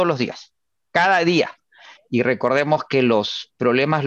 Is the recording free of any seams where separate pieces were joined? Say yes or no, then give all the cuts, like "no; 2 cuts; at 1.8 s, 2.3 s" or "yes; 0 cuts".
no; 1 cut; at 2.0 s